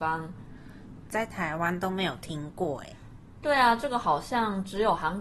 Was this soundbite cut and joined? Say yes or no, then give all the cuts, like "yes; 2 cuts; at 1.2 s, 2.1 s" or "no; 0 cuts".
yes; 1 cut; at 1.0 s